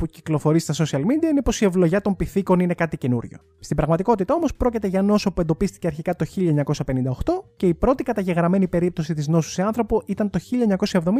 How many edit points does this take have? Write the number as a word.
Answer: zero